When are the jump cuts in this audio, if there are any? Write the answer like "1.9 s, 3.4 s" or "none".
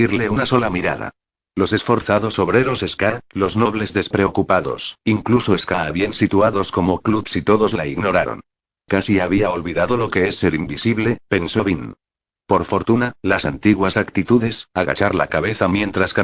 none